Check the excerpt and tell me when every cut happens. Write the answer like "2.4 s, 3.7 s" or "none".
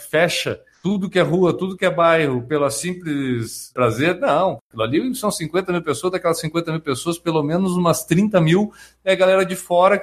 none